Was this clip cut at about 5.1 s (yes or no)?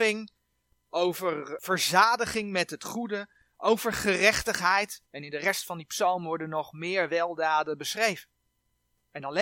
yes